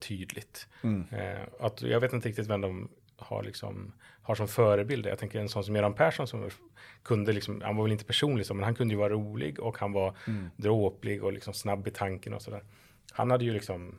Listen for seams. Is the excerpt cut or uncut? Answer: uncut